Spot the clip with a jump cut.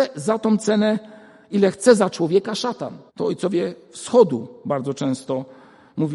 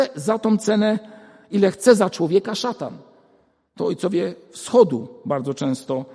first; 1 cut; at 3.1 s

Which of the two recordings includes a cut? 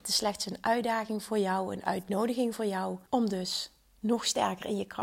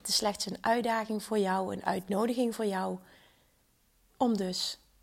first; 1 cut; at 3.1 s

